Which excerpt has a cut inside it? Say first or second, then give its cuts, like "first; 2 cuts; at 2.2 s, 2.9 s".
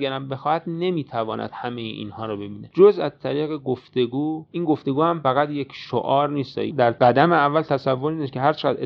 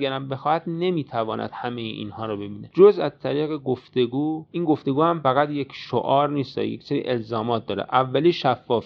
first; 1 cut; at 6.7 s